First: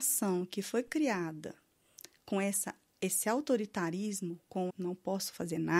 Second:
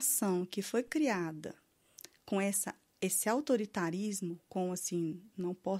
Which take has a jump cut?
first; 1 cut; at 4.7 s

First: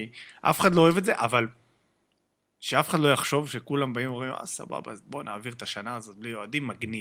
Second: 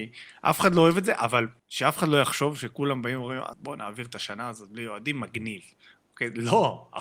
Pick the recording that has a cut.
second; 2 cuts; at 1.6 s, 3.5 s

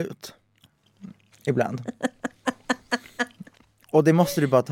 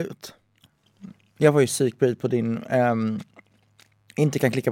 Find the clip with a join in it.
first; 1 cut; at 1.3 s

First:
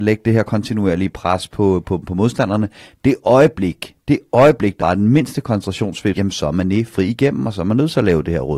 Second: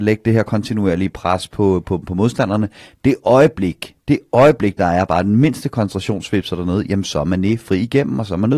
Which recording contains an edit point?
first; 2 cuts; at 4.8 s, 6.1 s

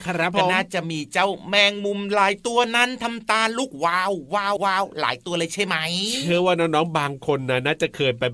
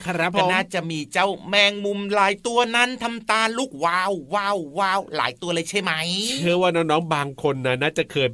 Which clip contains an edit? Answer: first; 1 cut; at 4.6 s

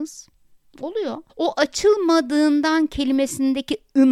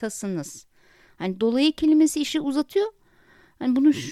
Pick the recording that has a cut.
first; 1 cut; at 1.3 s

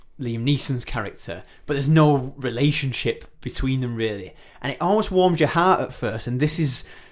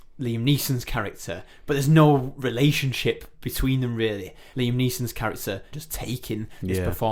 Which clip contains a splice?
second; 2 cuts; at 4.5 s, 5.7 s

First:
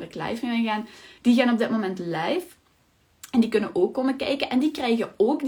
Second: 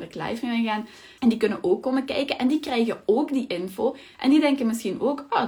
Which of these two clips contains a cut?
second; 2 cuts; at 1.2 s, 4.1 s

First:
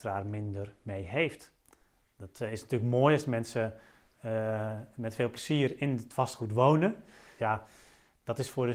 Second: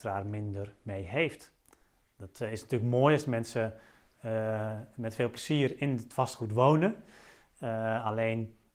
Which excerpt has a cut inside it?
first; 1 cut; at 7.4 s

